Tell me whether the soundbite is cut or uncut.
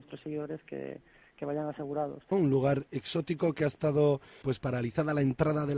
cut